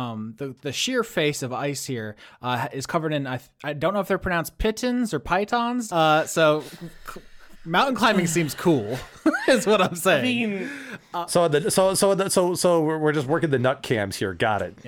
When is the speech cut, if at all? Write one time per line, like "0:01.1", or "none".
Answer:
0:05.9